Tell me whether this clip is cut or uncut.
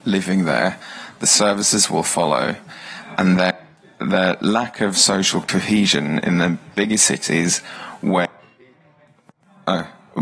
uncut